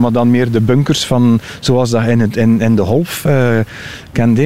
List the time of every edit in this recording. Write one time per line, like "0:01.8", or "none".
none